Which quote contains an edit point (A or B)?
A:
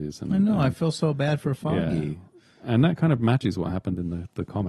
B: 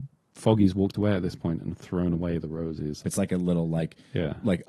B